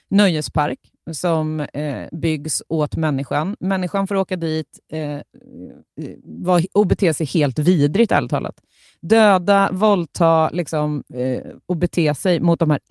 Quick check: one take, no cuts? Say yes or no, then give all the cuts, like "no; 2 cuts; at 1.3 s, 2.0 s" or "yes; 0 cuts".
yes; 0 cuts